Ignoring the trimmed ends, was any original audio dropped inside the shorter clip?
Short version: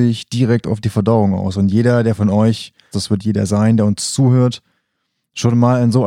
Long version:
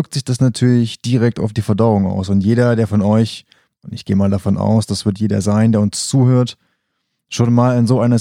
yes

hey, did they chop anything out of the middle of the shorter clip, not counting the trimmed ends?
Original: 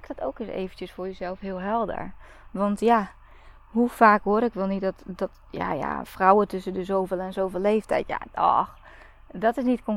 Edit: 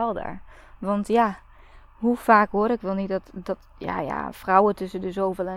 no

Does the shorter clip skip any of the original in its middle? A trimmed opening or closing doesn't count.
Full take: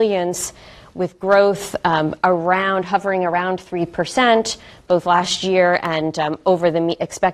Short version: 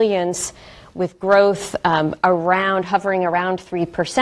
no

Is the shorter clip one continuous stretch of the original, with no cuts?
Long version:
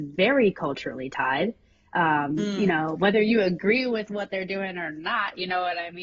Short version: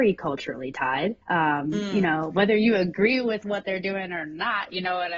no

